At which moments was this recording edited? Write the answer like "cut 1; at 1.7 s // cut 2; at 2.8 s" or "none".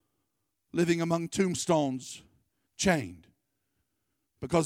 cut 1; at 2.7 s

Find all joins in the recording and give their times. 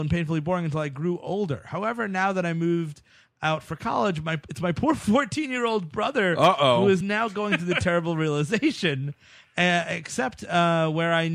none

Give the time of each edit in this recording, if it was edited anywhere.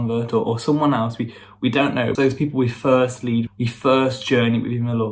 cut 1; at 2.2 s // cut 2; at 3.5 s

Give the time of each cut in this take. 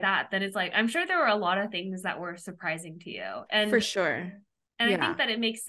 none

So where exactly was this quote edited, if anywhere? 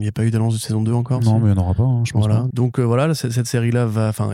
cut 1; at 2.5 s

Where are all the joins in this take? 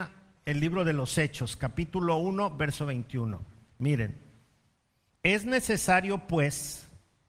cut 1; at 5.1 s

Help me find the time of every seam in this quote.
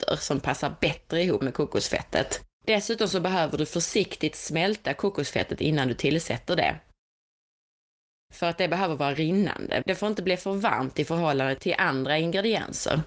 cut 1; at 1.4 s // cut 2; at 2.5 s // cut 3; at 9.8 s

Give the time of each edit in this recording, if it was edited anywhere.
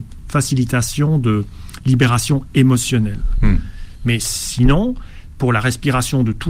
none

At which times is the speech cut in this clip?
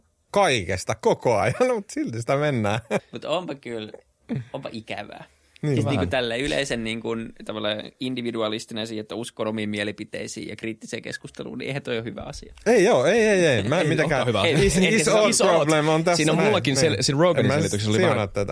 cut 1; at 3.0 s

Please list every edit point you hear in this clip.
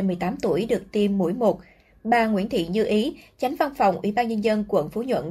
none

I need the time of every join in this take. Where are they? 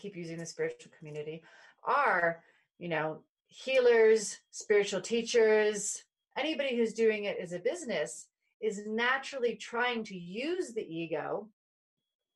cut 1; at 6.3 s

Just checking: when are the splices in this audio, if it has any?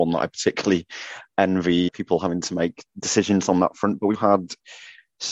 cut 1; at 1.9 s // cut 2; at 4.1 s

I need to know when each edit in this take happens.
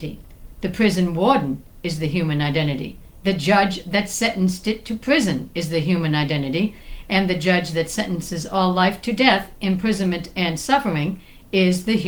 none

